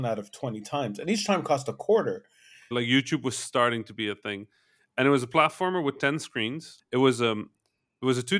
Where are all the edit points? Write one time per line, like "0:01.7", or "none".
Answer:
0:02.7
0:06.8